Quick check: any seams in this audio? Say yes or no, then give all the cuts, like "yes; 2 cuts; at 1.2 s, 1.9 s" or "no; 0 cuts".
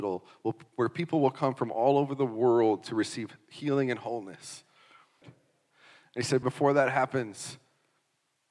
yes; 2 cuts; at 5.2 s, 6.4 s